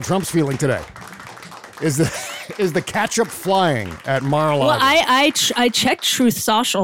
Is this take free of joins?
yes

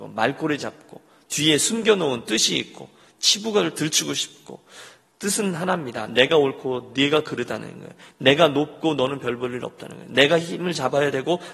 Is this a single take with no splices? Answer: yes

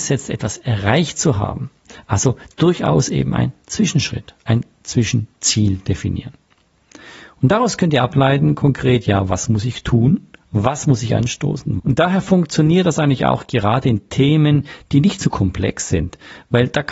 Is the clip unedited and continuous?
no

